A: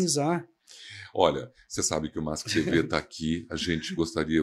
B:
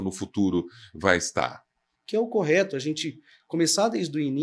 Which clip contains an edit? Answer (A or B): B